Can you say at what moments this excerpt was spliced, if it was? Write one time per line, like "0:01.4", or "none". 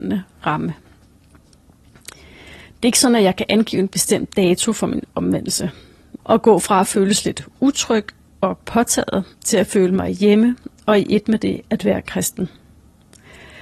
0:06.2
0:09.3